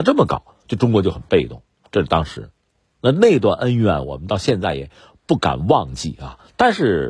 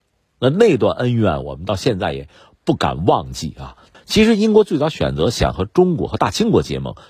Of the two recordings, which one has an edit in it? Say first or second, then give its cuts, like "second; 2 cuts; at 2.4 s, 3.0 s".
second; 1 cut; at 3.9 s